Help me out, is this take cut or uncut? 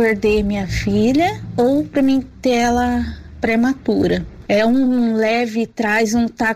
cut